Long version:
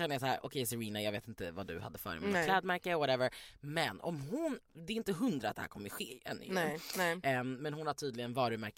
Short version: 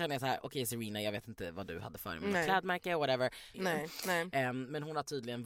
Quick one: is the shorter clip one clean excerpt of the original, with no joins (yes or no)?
no